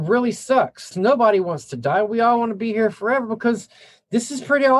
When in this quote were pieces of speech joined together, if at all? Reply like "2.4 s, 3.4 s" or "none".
0.9 s